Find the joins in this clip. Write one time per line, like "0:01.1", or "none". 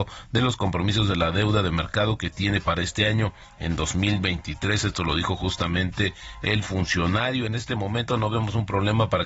none